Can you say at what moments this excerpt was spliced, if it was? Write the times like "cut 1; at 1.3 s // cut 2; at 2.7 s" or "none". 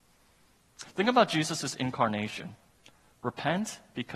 cut 1; at 3.1 s